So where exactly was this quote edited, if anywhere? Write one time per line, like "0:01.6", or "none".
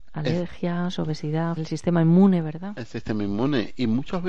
0:01.6